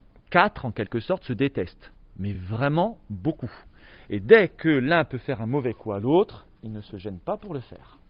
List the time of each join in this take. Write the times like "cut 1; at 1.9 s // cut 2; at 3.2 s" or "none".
none